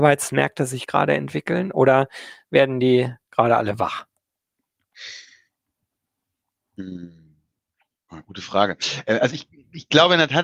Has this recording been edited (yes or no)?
no